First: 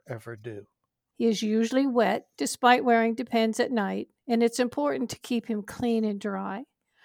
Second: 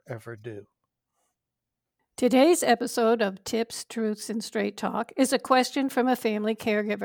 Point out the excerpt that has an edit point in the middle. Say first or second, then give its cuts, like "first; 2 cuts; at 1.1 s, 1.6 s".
first; 1 cut; at 1.1 s